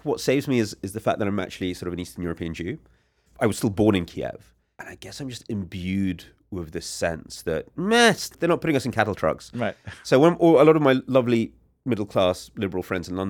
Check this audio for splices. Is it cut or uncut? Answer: cut